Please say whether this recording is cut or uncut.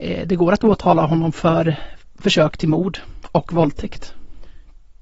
uncut